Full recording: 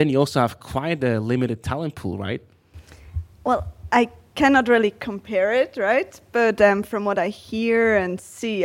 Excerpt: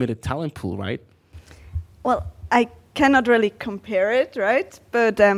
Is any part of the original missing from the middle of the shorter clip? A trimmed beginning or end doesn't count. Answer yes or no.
no